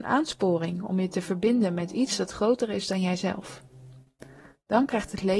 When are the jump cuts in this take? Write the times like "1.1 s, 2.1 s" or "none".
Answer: none